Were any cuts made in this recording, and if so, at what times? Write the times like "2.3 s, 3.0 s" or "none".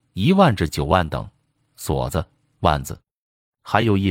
1.5 s